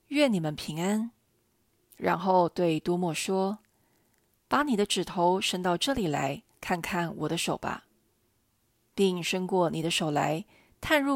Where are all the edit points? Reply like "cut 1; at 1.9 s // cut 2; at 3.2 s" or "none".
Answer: none